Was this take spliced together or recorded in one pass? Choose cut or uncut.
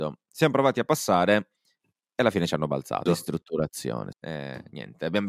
cut